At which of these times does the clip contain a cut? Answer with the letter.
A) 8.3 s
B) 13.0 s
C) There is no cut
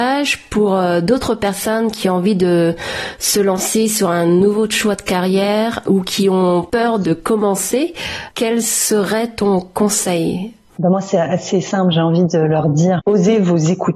B